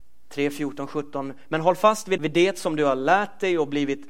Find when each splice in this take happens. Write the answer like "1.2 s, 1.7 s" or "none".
2.2 s